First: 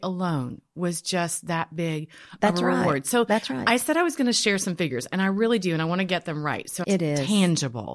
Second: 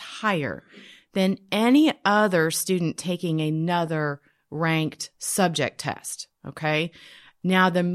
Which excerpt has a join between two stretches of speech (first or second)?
first